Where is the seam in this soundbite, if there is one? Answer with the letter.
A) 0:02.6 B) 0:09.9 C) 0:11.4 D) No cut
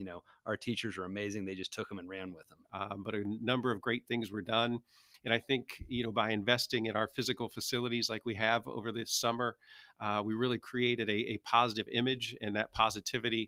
A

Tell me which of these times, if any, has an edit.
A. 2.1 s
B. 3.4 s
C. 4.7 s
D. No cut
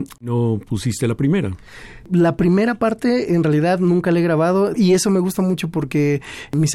C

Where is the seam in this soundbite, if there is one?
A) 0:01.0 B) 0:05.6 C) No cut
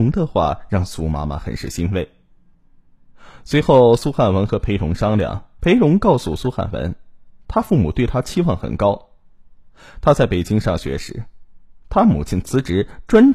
B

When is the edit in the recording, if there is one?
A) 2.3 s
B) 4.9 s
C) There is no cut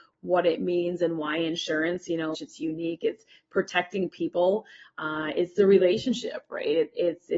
A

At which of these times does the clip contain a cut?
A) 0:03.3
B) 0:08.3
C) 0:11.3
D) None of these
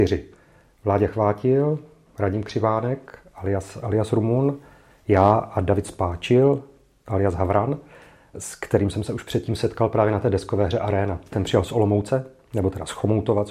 B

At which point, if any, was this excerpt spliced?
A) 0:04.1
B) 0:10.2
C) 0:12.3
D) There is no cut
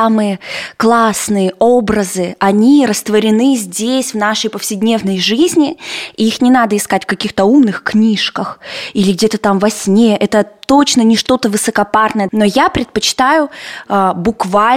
C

